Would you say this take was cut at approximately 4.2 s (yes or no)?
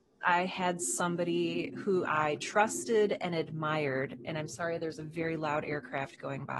no